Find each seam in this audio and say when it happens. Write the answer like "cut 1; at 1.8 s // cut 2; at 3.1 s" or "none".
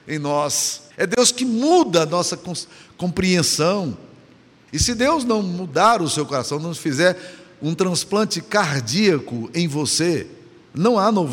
cut 1; at 0.9 s // cut 2; at 4.7 s